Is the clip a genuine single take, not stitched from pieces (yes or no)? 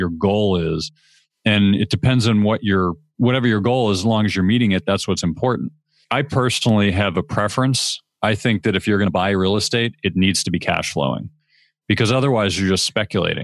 no